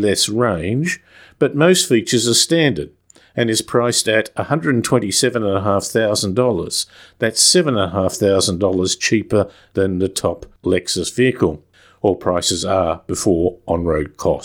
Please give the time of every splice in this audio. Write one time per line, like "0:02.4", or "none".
none